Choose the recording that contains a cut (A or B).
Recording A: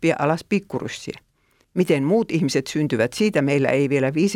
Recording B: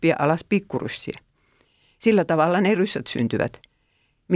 A